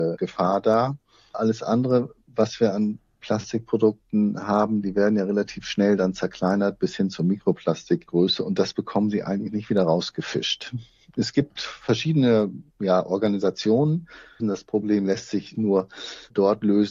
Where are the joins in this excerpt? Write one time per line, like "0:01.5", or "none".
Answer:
0:04.8
0:14.4
0:15.5